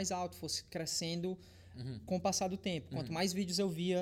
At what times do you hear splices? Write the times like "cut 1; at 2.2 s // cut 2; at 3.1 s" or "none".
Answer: none